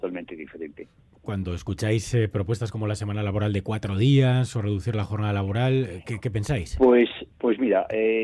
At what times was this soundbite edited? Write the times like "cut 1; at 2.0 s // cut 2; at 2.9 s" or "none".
cut 1; at 7.3 s